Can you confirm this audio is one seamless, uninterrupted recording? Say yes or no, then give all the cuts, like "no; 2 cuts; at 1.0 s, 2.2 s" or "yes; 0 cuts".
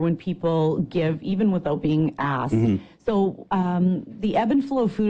yes; 0 cuts